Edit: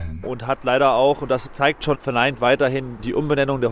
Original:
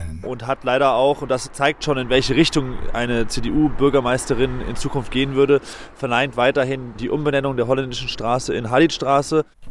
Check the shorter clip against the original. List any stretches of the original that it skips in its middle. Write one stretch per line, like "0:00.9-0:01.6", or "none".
0:01.9-0:05.9